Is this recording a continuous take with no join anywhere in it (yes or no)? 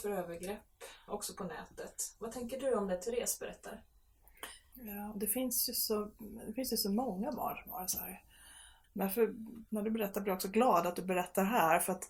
no